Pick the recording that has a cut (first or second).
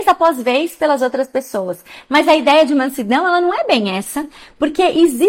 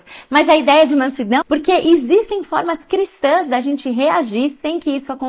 second